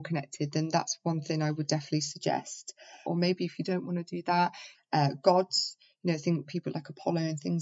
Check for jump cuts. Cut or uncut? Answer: cut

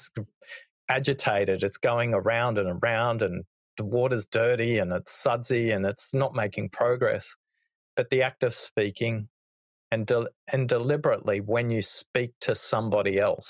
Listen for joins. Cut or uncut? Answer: uncut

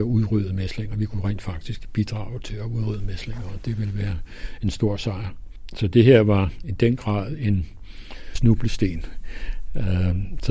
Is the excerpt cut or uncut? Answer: uncut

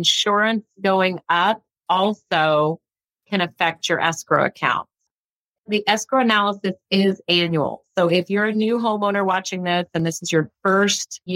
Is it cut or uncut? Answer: uncut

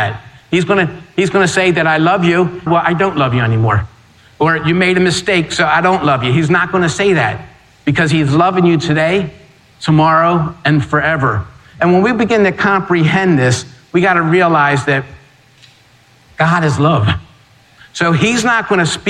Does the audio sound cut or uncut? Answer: cut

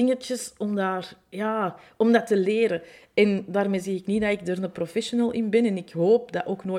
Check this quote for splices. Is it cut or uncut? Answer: uncut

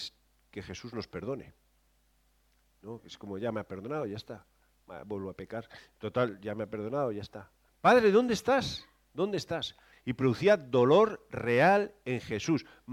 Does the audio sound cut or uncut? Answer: cut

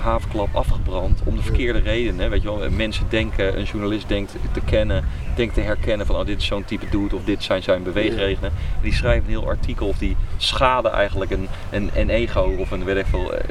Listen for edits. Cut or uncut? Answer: uncut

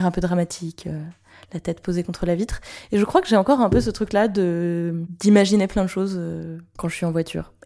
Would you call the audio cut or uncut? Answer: uncut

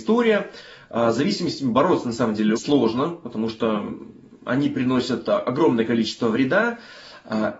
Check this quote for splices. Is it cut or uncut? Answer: cut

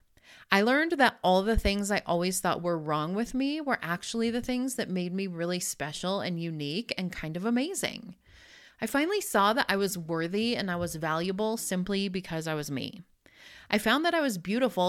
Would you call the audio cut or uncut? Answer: uncut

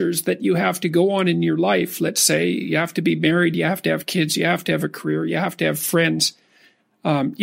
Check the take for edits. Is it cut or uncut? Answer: uncut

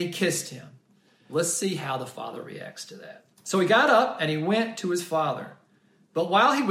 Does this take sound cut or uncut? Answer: cut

